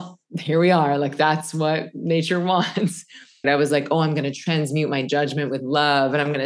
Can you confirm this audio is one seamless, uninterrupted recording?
no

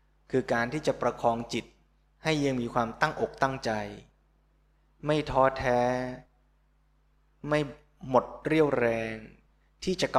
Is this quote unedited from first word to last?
yes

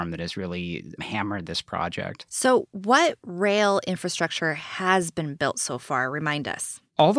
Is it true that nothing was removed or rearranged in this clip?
yes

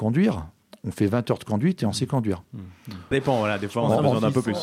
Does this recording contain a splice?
yes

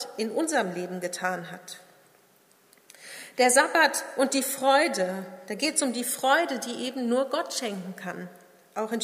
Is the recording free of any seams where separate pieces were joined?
yes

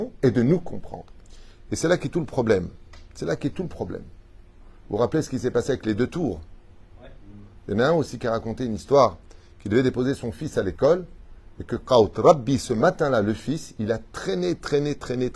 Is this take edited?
no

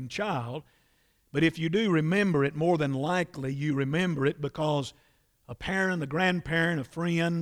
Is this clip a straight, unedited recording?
yes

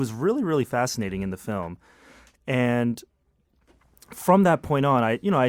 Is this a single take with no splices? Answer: yes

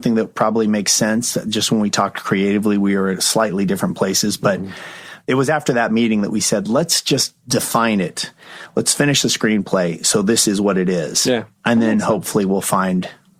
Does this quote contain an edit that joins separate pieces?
no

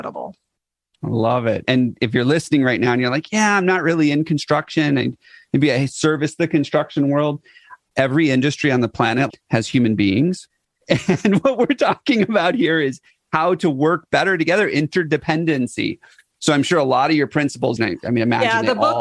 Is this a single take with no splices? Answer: no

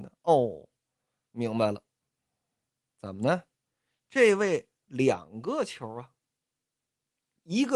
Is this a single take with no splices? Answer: yes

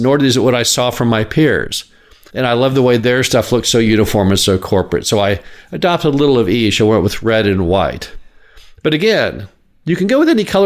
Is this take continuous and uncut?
no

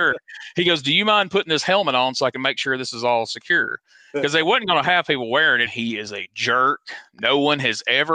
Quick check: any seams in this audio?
yes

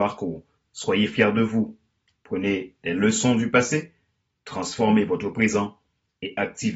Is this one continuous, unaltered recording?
yes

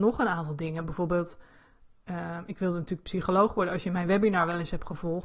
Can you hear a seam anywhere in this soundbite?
no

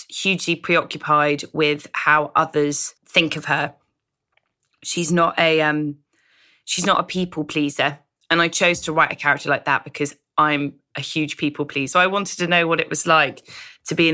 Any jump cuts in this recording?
yes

